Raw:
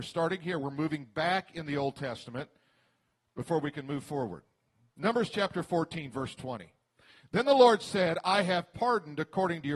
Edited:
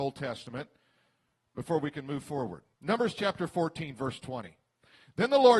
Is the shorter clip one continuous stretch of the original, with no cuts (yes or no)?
no